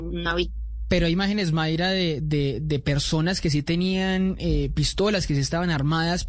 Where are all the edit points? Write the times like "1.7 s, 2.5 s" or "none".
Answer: none